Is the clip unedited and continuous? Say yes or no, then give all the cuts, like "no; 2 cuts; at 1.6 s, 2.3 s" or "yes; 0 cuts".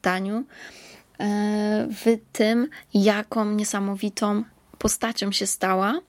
yes; 0 cuts